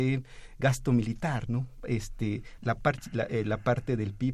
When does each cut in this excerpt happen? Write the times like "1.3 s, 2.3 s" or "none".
2.6 s